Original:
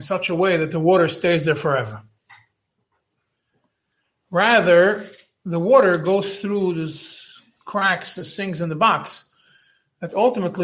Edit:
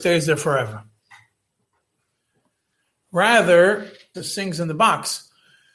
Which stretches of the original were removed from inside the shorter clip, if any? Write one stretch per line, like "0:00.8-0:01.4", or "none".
0:05.3-0:08.2